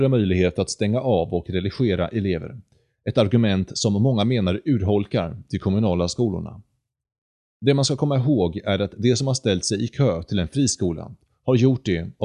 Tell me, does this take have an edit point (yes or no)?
no